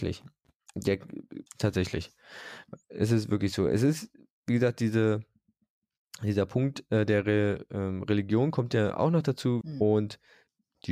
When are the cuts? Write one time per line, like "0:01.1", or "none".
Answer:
0:01.5
0:09.6